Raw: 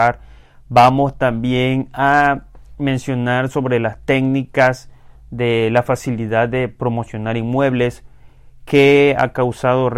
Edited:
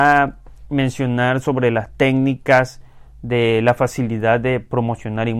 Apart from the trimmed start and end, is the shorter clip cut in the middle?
no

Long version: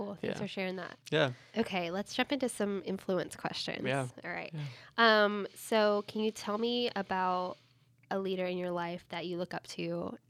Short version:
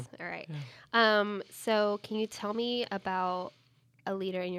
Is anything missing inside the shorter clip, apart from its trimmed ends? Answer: no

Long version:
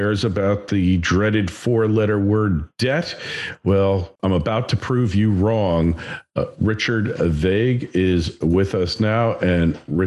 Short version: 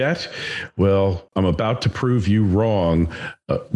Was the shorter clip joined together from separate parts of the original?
no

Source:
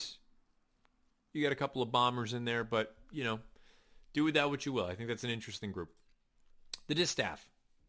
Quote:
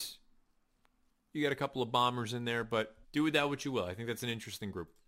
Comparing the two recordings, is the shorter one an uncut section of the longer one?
no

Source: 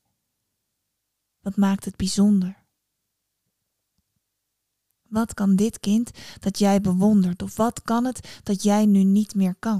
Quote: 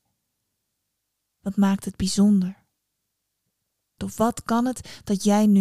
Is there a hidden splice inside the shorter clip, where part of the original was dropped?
yes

